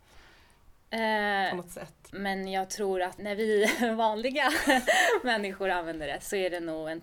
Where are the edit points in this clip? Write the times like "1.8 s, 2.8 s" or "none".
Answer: 2.1 s, 3.2 s